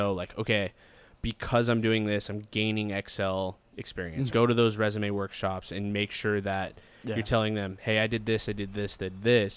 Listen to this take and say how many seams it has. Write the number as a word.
one